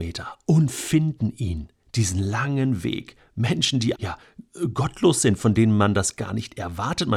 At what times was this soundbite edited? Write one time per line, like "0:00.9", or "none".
0:03.9